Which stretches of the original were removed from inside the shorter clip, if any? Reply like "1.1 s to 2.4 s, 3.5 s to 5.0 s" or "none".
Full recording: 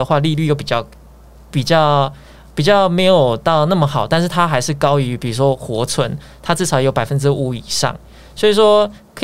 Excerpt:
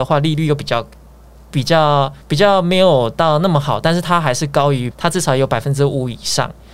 2.2 s to 2.5 s, 5.2 s to 6.4 s